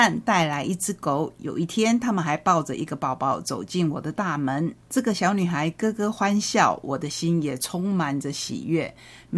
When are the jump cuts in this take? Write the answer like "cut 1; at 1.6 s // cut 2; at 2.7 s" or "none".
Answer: cut 1; at 4.8 s